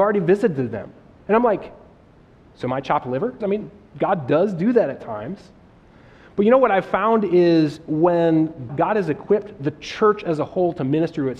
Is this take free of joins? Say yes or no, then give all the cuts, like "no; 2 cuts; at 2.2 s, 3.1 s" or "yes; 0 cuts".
no; 2 cuts; at 3.4 s, 8.7 s